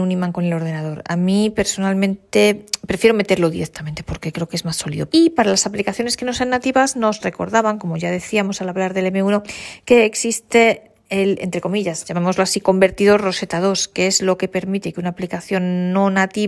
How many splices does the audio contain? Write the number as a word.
one